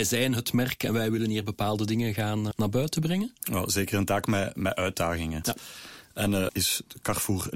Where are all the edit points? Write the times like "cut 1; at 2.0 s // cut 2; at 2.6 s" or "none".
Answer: cut 1; at 2.5 s // cut 2; at 5.4 s // cut 3; at 6.5 s